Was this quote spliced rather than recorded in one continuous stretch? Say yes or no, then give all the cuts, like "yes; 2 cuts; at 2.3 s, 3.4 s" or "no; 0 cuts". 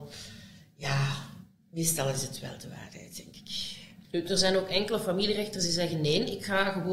yes; 1 cut; at 4.0 s